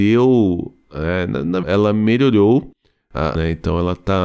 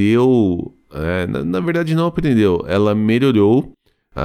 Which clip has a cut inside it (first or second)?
first